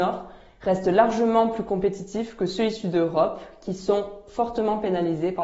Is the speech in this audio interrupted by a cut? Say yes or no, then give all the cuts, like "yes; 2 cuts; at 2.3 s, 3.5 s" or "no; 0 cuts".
no; 0 cuts